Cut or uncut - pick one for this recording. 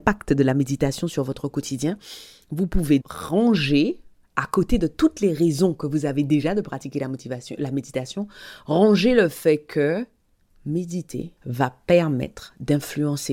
cut